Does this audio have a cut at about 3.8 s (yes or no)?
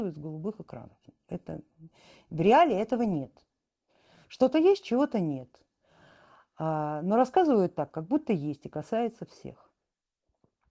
no